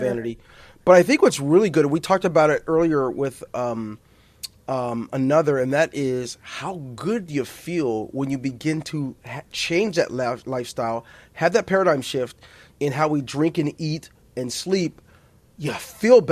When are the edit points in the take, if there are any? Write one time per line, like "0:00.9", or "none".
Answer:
none